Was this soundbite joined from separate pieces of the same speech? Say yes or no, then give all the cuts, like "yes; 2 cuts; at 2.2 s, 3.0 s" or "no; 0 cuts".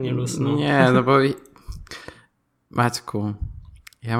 no; 0 cuts